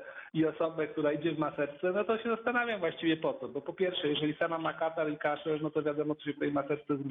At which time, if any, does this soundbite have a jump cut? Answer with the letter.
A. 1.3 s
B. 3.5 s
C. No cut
C